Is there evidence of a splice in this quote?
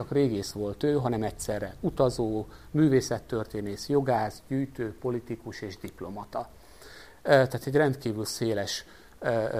no; 0 cuts

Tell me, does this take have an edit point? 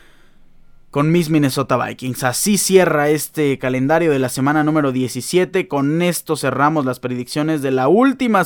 no; 0 cuts

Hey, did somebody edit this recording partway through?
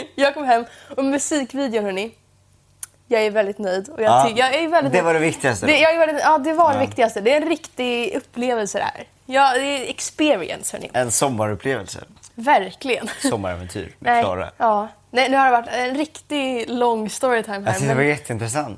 no; 0 cuts

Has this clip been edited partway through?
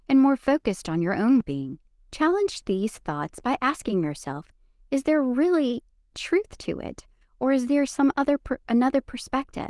yes; 1 cut; at 1.4 s

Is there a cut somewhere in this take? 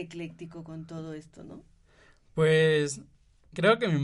no; 0 cuts

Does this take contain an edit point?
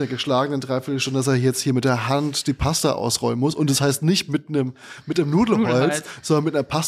no; 0 cuts

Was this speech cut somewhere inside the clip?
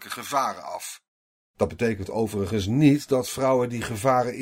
no; 0 cuts

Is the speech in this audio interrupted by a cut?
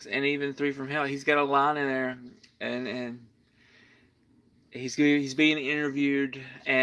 no; 0 cuts

